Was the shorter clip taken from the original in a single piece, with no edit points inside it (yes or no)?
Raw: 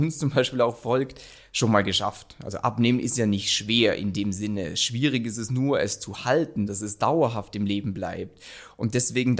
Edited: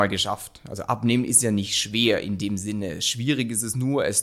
yes